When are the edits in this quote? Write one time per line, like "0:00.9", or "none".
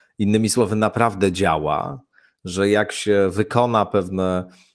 none